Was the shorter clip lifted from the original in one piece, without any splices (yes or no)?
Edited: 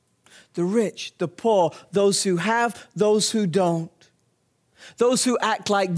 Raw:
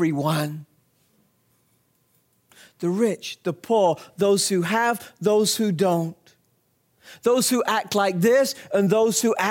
yes